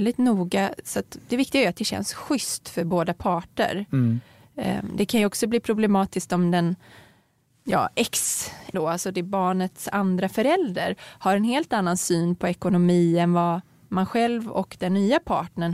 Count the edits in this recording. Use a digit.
1